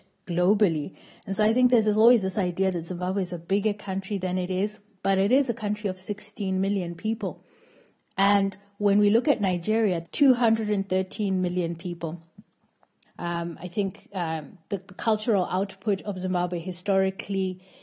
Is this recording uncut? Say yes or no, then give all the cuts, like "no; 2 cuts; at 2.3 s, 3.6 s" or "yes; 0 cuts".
no; 2 cuts; at 10.0 s, 13.0 s